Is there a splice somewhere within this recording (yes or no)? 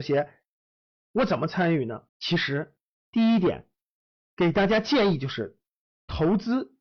yes